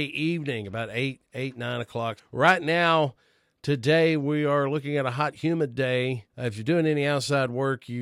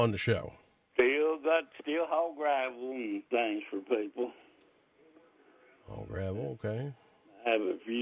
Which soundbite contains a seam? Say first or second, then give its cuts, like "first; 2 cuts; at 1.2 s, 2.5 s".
first; 2 cuts; at 2.2 s, 6.3 s